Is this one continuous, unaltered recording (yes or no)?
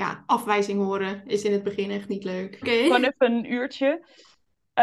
no